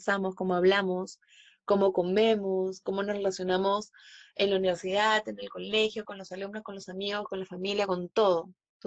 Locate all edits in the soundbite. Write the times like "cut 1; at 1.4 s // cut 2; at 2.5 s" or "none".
cut 1; at 6.0 s